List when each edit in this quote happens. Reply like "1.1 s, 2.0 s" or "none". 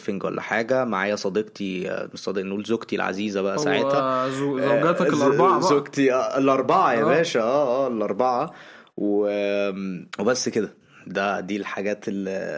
10.1 s